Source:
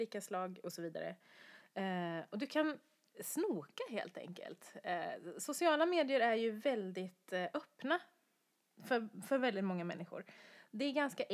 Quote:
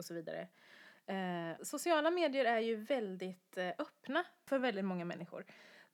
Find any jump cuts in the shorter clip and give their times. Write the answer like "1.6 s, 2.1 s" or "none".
1.6 s, 4.5 s

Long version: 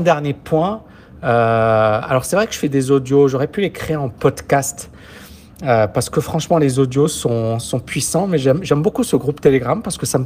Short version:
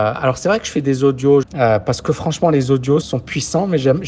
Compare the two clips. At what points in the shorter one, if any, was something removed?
1.4 s, 3.0 s

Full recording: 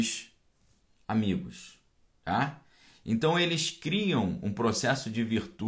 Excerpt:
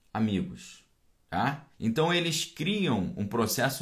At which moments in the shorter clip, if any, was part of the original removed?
1.7 s

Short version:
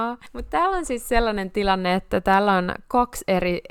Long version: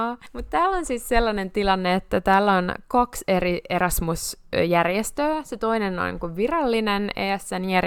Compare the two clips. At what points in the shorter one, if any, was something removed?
none

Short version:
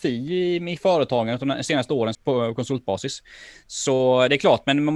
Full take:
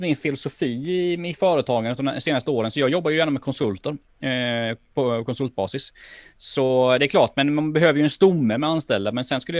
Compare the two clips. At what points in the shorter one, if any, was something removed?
2.1 s

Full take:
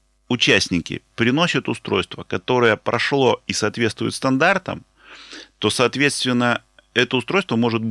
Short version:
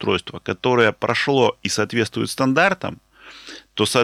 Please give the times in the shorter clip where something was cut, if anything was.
none

